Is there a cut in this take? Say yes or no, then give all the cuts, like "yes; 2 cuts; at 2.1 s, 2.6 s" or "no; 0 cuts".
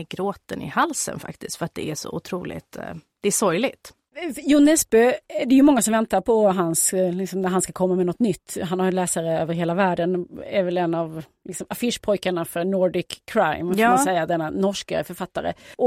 no; 0 cuts